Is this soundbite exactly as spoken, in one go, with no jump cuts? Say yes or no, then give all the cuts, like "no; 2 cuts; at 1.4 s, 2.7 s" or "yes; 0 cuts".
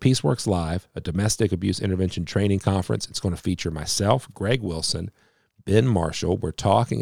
yes; 0 cuts